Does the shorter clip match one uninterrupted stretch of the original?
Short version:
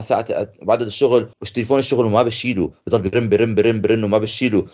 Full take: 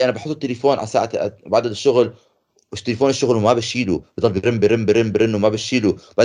no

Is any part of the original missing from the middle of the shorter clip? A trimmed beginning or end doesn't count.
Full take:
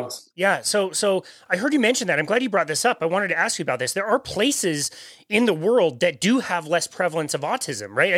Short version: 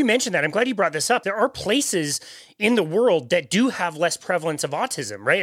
yes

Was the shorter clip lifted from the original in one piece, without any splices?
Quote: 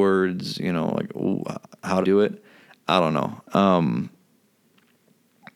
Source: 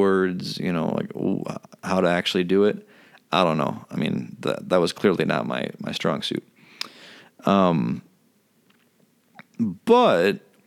no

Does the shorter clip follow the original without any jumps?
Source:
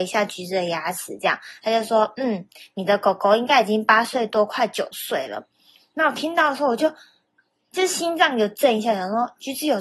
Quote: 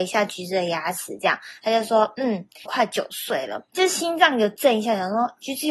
no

